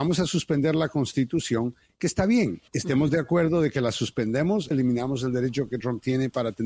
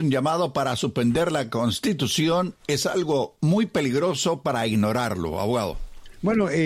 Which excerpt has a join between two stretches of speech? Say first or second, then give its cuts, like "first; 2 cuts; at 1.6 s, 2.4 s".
first; 2 cuts; at 2.7 s, 4.7 s